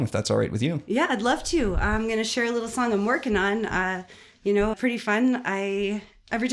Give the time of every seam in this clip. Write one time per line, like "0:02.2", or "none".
0:04.7